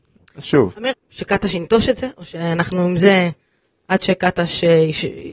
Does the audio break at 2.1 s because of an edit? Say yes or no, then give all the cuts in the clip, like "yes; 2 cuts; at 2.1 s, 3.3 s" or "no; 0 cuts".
no; 1 cut; at 0.9 s